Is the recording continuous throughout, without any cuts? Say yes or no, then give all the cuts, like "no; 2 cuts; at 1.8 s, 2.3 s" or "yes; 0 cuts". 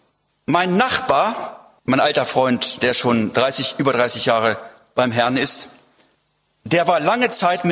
yes; 0 cuts